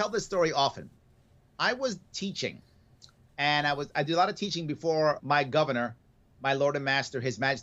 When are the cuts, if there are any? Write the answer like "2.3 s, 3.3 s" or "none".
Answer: 5.2 s